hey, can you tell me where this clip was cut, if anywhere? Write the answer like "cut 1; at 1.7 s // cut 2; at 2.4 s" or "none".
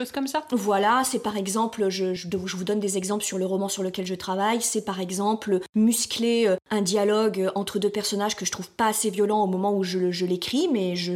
cut 1; at 2.2 s